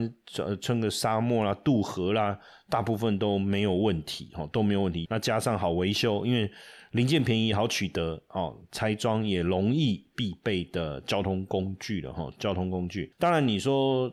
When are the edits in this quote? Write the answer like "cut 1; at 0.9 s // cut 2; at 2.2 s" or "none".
cut 1; at 5.0 s // cut 2; at 10.1 s